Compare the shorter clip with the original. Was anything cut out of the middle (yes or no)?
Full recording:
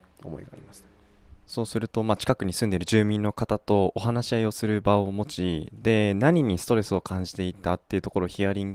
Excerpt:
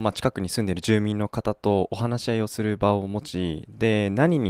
no